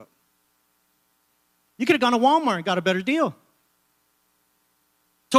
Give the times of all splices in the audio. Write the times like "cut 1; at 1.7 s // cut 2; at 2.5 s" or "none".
cut 1; at 1.7 s